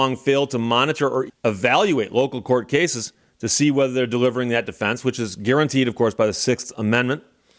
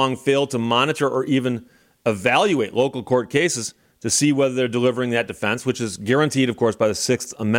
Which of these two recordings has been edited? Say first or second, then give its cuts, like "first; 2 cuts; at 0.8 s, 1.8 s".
first; 1 cut; at 1.3 s